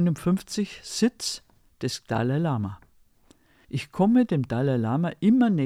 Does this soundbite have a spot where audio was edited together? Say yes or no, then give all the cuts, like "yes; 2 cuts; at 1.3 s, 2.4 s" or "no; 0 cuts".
yes; 1 cut; at 3.6 s